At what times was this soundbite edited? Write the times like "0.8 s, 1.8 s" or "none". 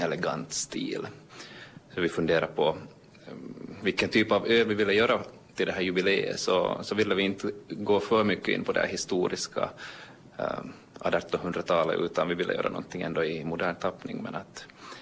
none